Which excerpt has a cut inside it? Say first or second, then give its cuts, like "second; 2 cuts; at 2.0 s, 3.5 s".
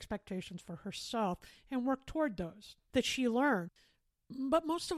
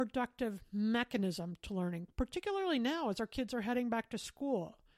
first; 1 cut; at 2.9 s